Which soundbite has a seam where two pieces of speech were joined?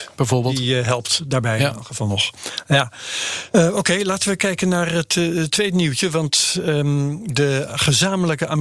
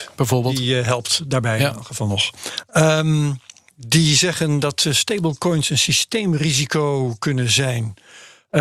second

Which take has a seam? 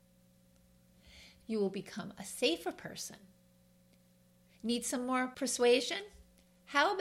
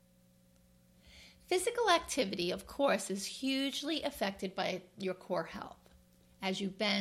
first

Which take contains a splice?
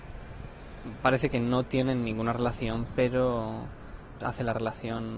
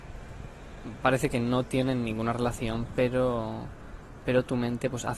first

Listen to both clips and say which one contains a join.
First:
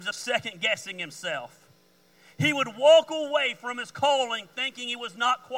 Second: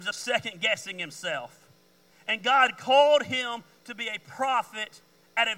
second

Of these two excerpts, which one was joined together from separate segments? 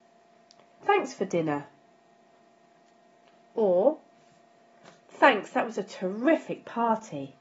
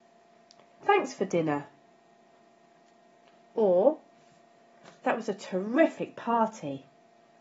second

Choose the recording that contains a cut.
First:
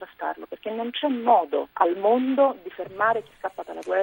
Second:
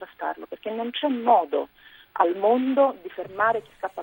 first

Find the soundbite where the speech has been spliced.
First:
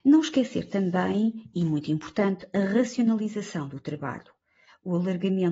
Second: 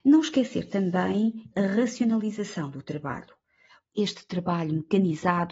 second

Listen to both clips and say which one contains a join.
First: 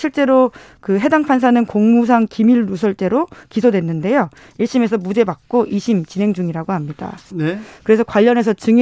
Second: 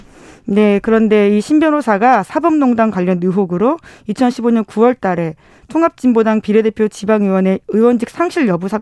first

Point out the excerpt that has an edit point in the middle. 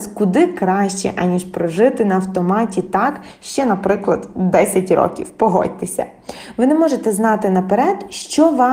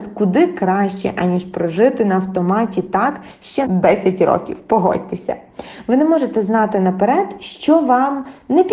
second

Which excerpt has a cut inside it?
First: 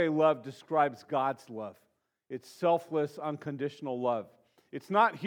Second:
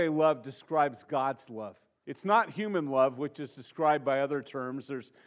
second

